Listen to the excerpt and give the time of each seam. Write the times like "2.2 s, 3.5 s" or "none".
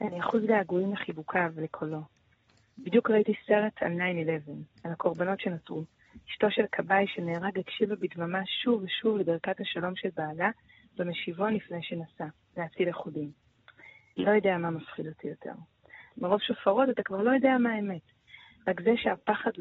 14.1 s, 16.1 s